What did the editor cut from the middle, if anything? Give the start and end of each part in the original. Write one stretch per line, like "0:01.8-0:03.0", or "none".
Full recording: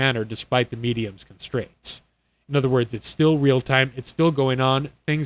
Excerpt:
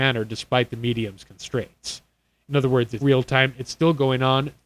0:03.0-0:03.4